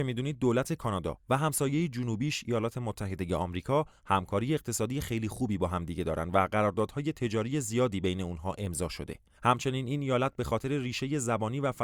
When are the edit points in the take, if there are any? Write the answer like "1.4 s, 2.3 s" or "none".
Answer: 9.4 s

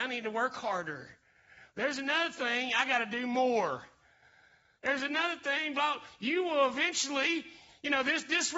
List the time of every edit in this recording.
none

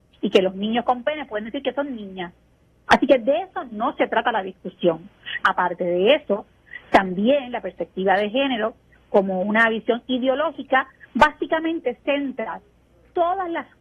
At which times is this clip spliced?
2.9 s, 5.4 s

